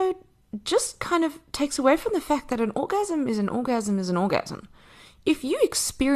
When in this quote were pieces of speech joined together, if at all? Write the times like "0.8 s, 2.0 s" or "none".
none